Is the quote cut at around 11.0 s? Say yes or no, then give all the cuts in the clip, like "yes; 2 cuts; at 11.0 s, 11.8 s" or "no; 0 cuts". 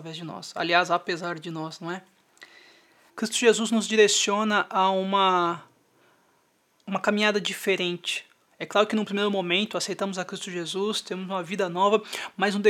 no; 1 cut; at 3.1 s